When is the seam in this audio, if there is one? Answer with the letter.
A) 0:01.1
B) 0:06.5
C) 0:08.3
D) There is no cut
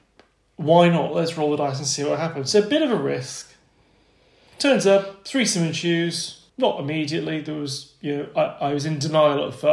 B